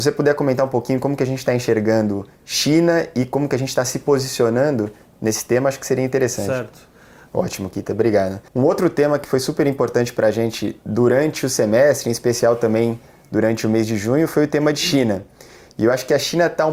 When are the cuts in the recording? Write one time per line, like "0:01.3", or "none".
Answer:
0:07.3
0:08.5